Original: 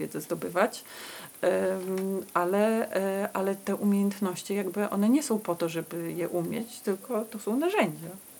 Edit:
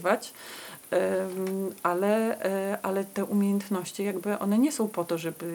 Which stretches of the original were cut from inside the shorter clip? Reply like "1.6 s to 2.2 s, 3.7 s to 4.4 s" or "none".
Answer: none